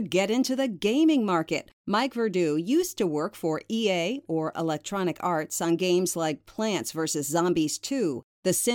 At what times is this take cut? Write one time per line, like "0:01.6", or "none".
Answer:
0:01.8